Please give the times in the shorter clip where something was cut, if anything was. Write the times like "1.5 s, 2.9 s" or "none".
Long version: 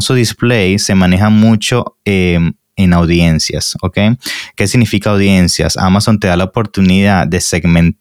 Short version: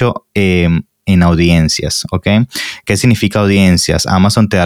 none